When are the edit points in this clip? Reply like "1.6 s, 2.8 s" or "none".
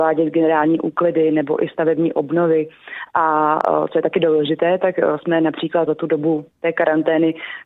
5.9 s